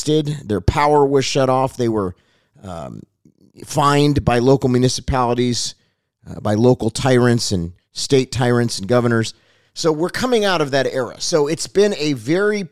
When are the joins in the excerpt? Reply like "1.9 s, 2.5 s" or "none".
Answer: none